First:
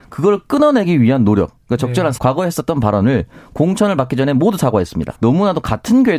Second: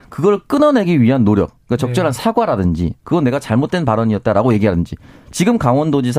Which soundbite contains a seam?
first; 2 cuts; at 2.2 s, 5.1 s

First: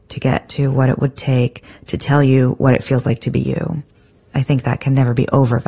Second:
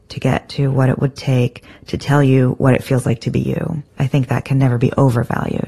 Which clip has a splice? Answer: second; 1 cut; at 3.9 s

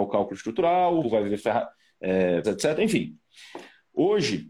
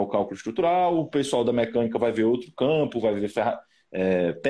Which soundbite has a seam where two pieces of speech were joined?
first; 2 cuts; at 1.0 s, 2.4 s

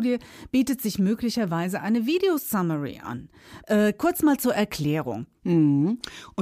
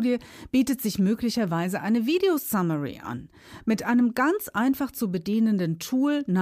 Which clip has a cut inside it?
first; 2 cuts; at 3.6 s, 5.3 s

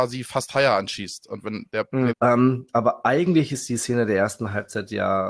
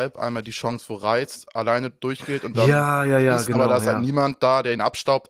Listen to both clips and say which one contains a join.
first; 1 cut; at 2.1 s

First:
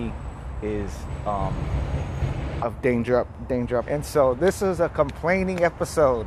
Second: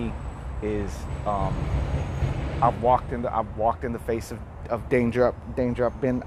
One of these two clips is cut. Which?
first; 2 cuts; at 2.6 s, 3.8 s

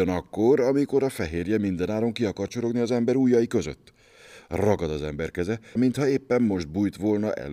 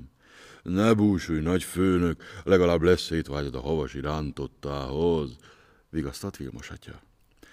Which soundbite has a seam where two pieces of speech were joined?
first; 1 cut; at 5.8 s

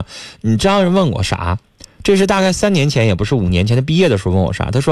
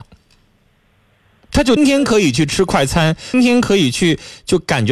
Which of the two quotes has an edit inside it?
second; 2 cuts; at 1.8 s, 3.3 s

